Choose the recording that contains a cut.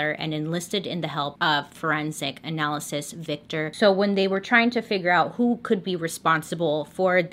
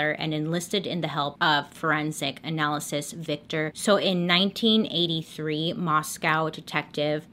second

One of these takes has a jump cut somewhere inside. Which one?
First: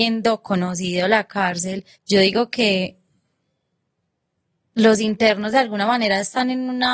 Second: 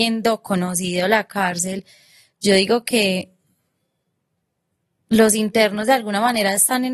first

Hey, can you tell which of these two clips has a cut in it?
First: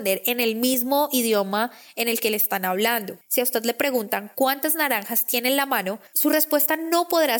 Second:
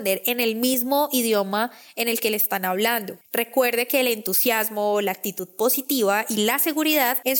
second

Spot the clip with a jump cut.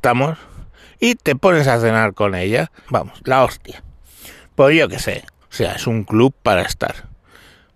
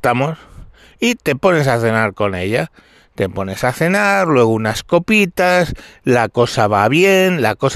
first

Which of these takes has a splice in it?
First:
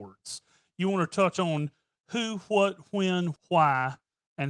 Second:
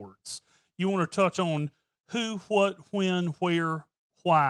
first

